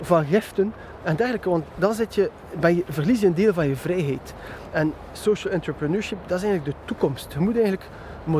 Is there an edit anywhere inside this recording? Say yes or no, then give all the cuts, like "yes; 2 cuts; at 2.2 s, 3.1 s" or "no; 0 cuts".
yes; 1 cut; at 4.7 s